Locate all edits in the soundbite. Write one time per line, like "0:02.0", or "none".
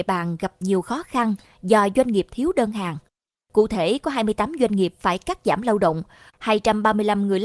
0:06.3